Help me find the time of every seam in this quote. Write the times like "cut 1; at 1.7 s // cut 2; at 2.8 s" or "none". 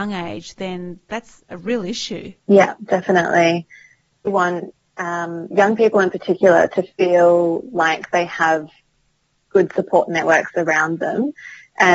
cut 1; at 2.4 s // cut 2; at 4.3 s